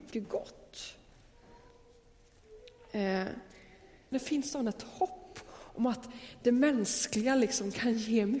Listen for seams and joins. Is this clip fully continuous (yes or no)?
no